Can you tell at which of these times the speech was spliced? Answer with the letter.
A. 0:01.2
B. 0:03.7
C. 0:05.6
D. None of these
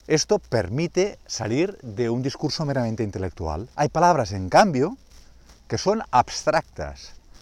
B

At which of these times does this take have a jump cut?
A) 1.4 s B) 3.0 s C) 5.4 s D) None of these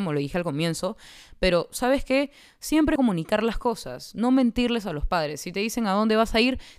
B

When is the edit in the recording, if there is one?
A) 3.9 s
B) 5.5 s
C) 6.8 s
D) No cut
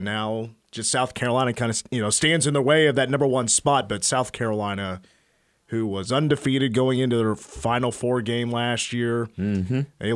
D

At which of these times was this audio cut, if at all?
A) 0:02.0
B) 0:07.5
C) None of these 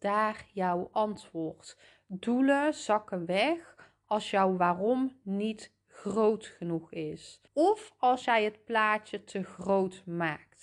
B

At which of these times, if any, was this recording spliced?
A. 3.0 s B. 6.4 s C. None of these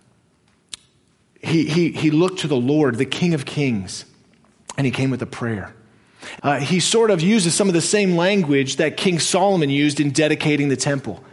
B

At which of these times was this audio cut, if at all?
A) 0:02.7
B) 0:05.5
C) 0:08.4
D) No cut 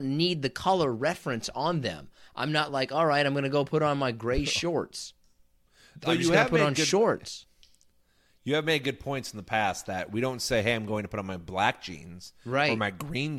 D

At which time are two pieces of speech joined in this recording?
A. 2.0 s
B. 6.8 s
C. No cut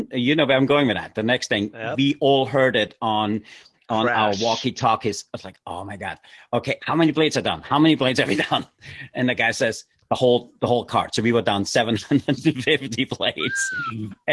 B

